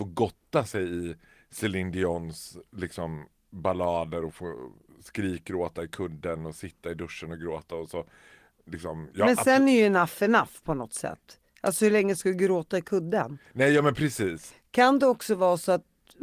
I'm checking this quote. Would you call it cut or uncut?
uncut